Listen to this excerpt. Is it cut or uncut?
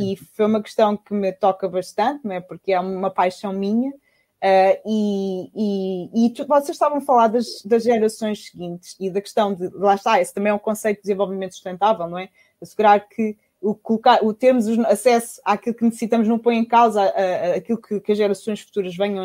uncut